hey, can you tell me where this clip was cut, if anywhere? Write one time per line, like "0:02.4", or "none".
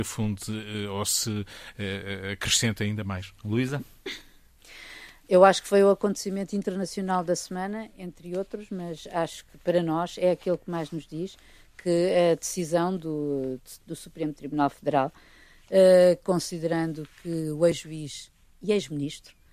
0:05.2
0:13.8